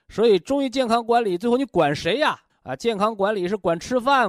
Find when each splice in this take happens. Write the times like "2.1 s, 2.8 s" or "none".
2.5 s

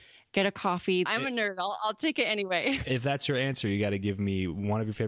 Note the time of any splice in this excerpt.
1.1 s

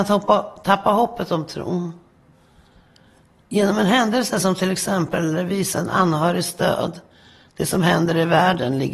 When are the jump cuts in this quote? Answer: none

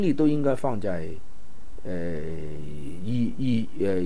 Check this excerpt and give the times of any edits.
none

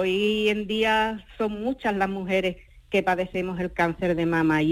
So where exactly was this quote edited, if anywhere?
none

